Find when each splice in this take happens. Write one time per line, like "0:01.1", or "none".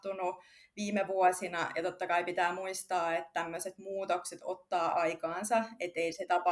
none